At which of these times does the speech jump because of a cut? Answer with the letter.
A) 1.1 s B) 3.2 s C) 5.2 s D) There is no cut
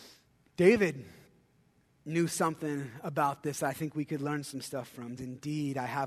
C